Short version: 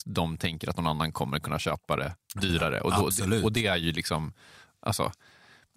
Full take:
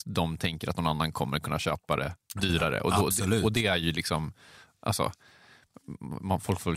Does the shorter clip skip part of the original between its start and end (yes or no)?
no